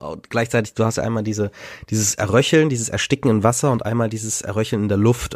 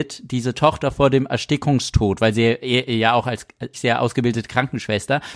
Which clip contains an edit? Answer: second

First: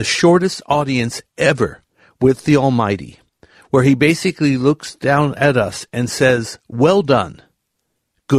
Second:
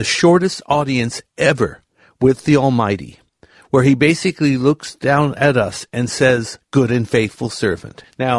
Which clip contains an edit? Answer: second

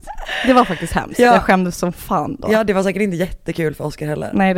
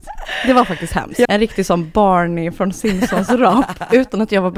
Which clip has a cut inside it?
second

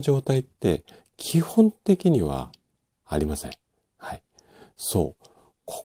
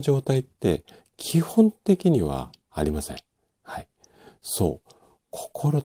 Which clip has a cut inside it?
second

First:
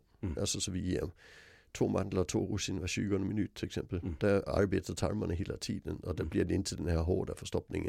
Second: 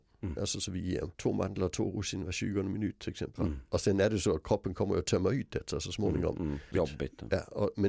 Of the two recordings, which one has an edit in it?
second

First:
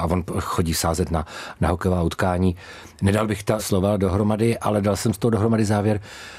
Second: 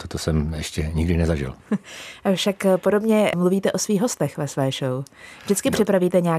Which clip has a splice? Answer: first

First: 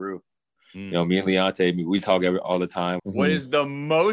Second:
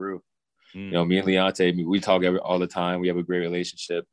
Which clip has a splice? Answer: first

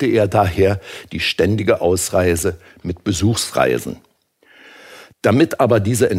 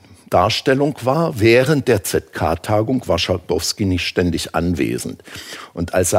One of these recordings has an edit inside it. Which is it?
first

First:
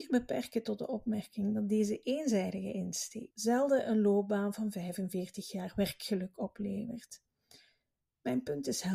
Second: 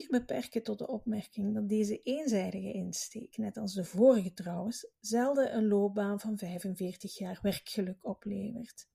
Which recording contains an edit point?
first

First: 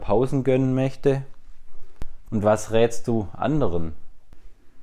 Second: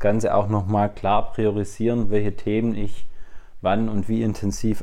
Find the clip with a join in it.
first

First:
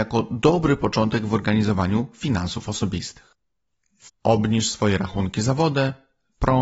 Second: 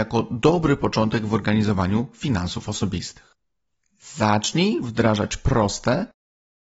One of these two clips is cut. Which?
first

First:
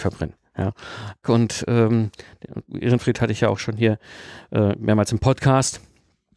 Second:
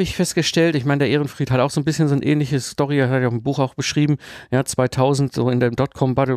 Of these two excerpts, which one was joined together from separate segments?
first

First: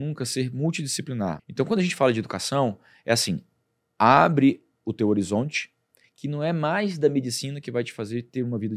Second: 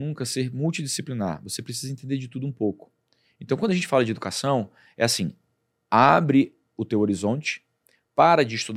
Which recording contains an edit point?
first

